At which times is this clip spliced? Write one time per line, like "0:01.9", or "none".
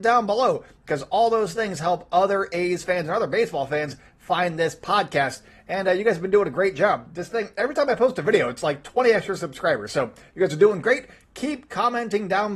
none

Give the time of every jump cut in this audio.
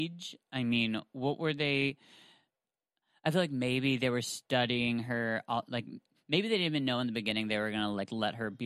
none

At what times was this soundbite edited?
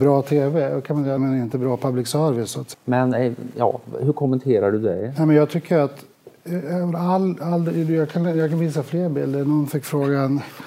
0:01.2
0:02.7

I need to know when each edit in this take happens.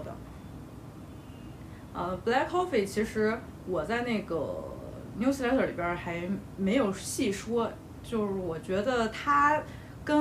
0:01.9

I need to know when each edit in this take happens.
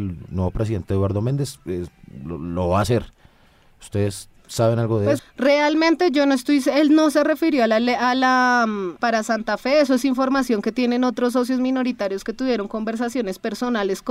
0:05.2
0:09.0

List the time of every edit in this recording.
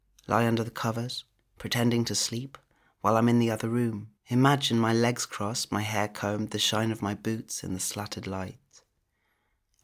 0:04.2

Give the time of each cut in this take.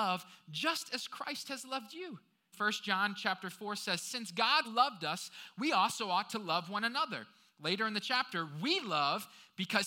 0:02.5
0:04.6

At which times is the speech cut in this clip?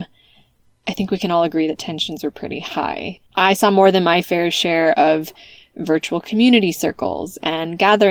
0:03.3

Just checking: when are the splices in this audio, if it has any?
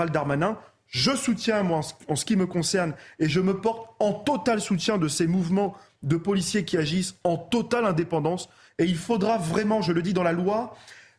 none

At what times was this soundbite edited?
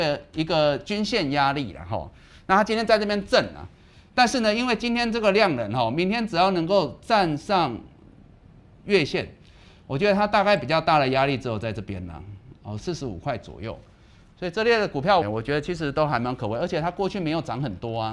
0:12.8
0:15.2

